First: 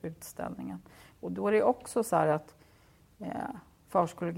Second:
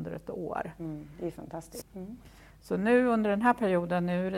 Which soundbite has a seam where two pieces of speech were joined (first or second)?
second